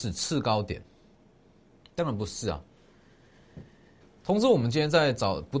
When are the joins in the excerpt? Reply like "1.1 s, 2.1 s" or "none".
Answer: 1.8 s, 4.0 s